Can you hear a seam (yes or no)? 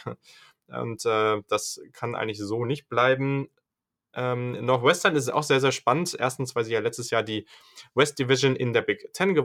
no